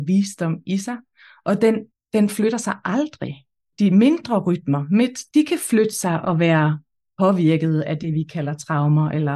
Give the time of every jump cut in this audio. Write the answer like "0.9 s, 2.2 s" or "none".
1.9 s, 3.7 s, 5.3 s